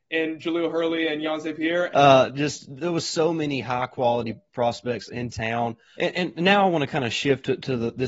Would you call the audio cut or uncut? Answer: cut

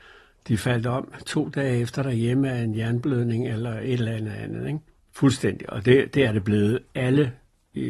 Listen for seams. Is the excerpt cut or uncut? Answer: cut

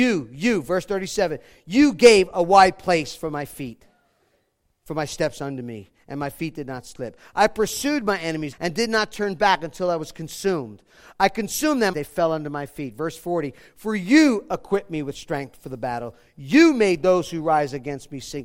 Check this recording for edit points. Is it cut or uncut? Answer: cut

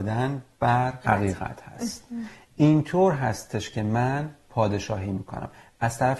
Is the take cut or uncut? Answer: cut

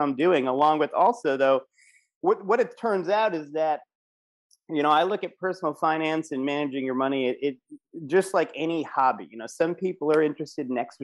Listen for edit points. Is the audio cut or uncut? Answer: uncut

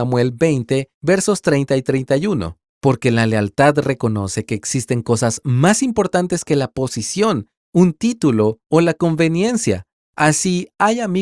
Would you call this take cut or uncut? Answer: cut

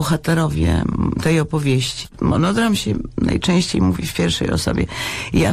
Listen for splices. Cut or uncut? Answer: uncut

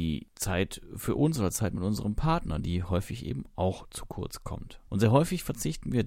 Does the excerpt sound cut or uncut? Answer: cut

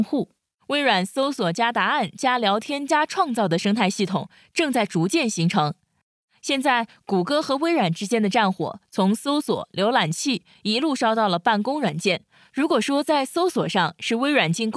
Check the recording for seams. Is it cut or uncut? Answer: uncut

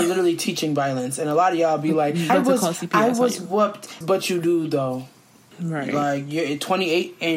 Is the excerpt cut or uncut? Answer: cut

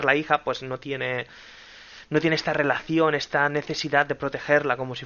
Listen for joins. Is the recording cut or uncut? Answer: uncut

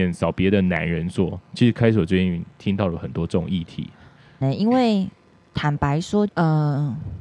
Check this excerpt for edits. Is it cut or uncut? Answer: cut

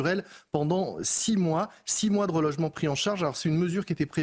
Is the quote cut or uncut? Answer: uncut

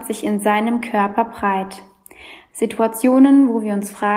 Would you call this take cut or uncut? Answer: cut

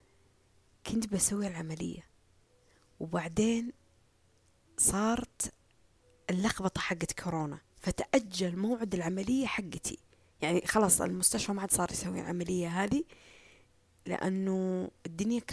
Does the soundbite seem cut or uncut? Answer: cut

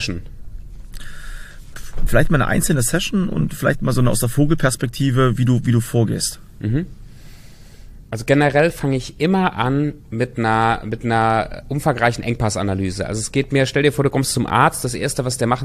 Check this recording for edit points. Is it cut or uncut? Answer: cut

